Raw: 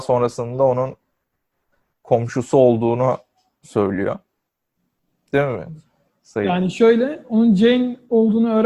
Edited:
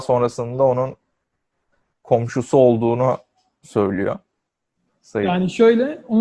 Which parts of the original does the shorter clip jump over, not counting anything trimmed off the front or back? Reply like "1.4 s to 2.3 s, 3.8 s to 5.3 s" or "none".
4.9 s to 6.1 s